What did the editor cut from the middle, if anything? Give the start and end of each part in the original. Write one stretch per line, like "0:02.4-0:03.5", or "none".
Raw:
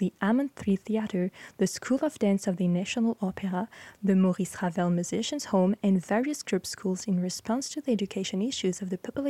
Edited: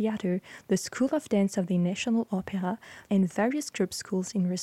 0:04.0-0:05.8